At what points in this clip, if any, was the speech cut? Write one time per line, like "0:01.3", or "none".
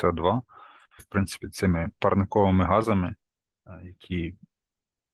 0:01.0